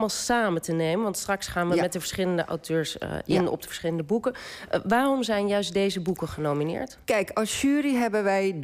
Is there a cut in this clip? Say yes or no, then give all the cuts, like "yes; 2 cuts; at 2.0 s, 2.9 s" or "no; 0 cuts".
no; 0 cuts